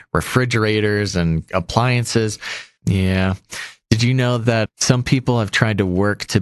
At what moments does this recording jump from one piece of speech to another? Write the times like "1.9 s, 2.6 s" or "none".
2.8 s, 4.7 s